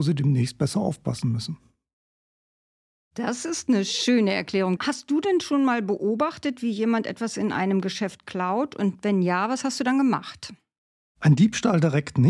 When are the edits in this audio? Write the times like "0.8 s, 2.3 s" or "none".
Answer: 4.8 s